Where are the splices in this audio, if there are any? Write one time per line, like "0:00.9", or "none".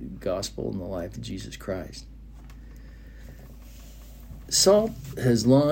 none